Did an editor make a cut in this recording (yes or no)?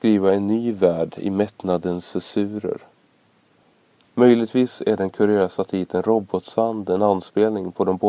yes